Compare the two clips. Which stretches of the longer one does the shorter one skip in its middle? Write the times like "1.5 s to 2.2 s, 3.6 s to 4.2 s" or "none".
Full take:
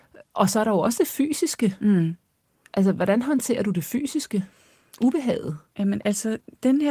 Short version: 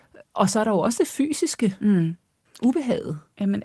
2.5 s to 4.8 s

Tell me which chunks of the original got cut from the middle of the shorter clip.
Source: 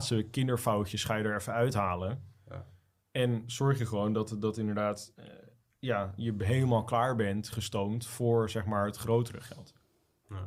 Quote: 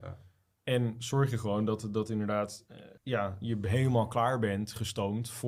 5.5 s to 5.7 s

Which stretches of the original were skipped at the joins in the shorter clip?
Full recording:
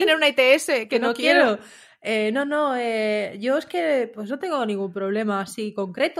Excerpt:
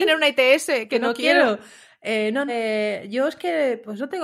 2.5 s to 2.8 s

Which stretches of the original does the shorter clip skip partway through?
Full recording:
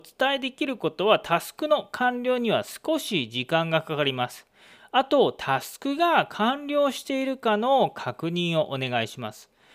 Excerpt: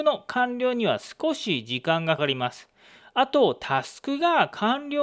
3.8 s to 4.0 s

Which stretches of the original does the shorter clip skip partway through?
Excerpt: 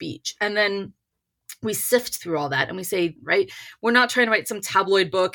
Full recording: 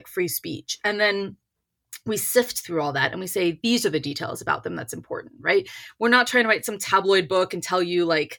3.6 s to 5.3 s

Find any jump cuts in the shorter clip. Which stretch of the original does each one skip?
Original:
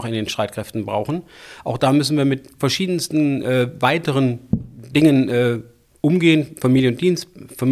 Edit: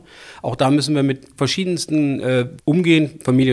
3.8 s to 5.9 s

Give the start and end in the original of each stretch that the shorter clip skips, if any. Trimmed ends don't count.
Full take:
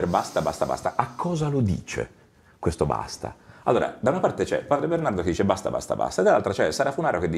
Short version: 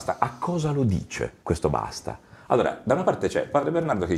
2.2 s to 2.6 s

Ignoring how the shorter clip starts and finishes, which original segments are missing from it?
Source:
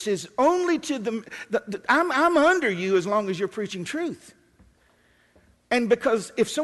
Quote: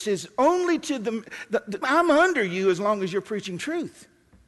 1.8 s to 2.1 s

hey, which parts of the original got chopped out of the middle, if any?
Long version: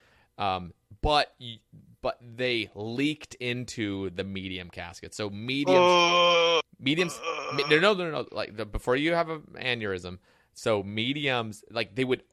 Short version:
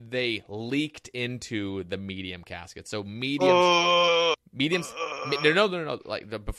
none

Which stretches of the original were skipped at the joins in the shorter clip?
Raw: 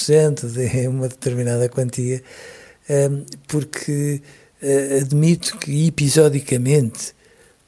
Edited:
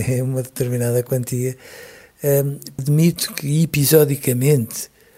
3.4 s to 5.0 s

